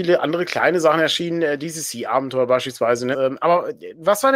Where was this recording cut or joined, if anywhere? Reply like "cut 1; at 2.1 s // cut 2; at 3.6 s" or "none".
cut 1; at 3.1 s